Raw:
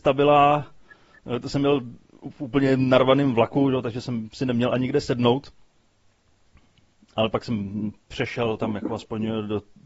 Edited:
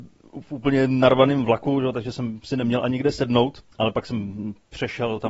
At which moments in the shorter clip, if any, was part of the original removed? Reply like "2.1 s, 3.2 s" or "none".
3.7 s